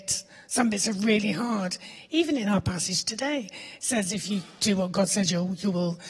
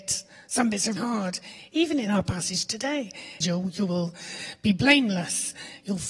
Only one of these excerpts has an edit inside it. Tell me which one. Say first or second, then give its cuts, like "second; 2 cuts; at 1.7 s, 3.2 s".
second; 2 cuts; at 1.0 s, 3.4 s